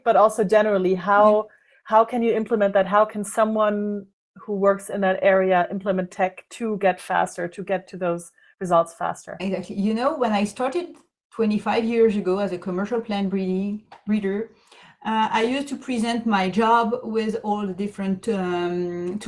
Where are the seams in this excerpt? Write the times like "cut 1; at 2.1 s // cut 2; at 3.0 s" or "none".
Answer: none